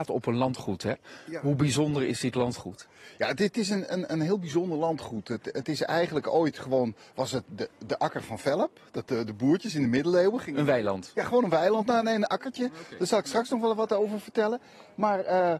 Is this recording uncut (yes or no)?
yes